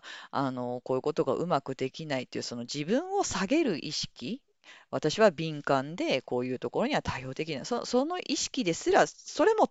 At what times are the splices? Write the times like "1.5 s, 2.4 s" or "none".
none